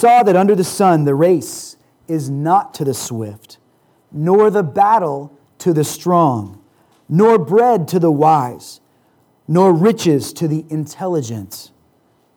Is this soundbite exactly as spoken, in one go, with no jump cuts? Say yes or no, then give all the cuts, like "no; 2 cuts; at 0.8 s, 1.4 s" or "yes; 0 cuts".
yes; 0 cuts